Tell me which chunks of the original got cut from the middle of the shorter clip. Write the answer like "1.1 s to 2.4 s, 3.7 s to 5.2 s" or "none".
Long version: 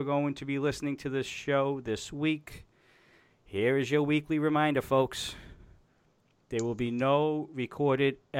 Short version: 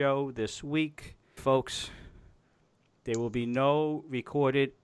2.9 s to 4.8 s